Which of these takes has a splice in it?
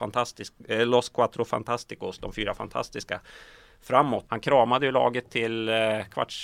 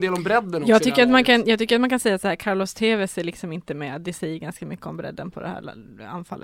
first; 1 cut; at 4.3 s

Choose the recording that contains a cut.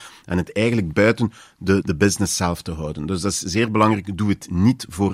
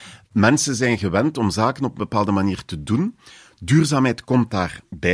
first; 1 cut; at 1.8 s

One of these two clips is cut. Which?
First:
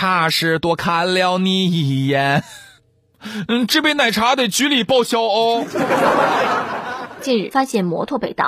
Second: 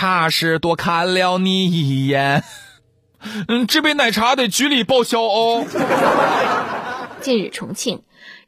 first; 1 cut; at 7.5 s

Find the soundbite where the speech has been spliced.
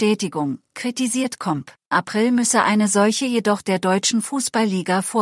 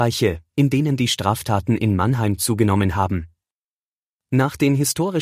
first; 1 cut; at 1.9 s

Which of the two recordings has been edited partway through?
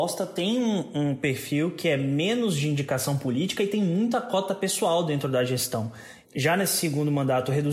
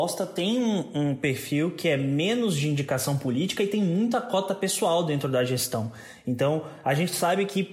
first; 1 cut; at 6.2 s

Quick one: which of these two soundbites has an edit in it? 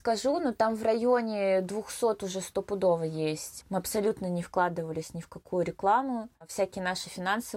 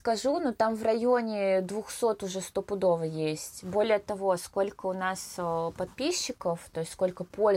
first; 1 cut; at 3.6 s

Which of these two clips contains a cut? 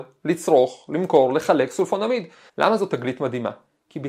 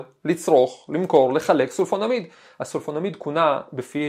first; 1 cut; at 2.5 s

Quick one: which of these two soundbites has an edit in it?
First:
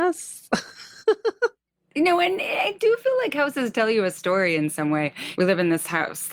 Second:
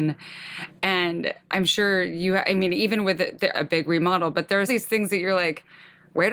second; 2 cuts; at 3.5 s, 4.7 s

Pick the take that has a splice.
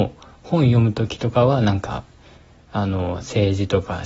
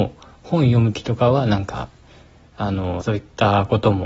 second; 2 cuts; at 0.9 s, 3.0 s

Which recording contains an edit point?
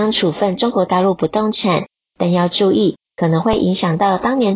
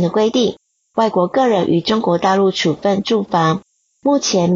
first; 1 cut; at 3.0 s

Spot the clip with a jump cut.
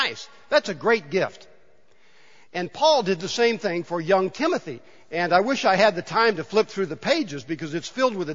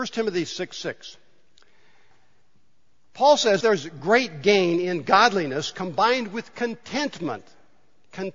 second; 1 cut; at 3.6 s

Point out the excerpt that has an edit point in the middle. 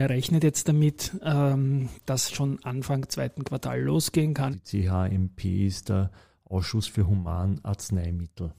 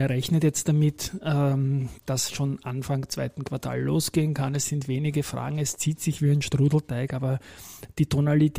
first; 1 cut; at 4.5 s

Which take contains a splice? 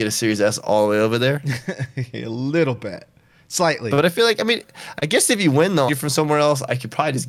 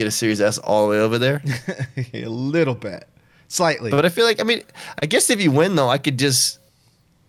first; 1 cut; at 5.9 s

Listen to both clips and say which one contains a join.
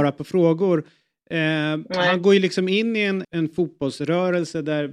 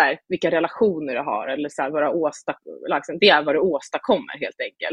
first; 1 cut; at 3.2 s

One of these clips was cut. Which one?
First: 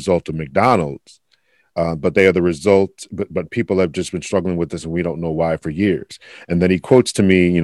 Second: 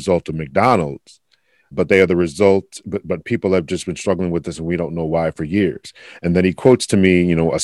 second; 1 cut; at 1.7 s

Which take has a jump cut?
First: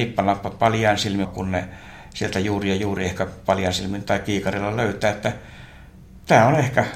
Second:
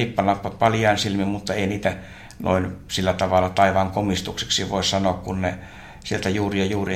first; 1 cut; at 1.2 s

